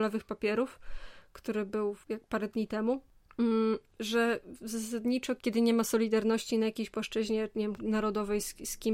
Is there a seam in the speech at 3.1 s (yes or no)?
no